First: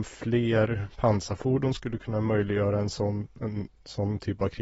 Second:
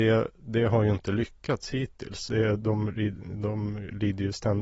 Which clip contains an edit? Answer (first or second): second